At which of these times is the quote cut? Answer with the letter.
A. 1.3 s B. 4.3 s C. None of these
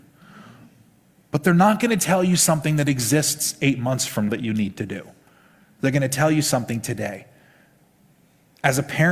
B